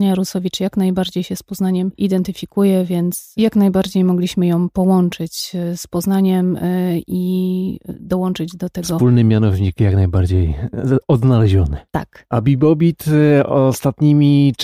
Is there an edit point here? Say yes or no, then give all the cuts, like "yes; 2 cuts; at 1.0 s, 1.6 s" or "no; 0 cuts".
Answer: no; 0 cuts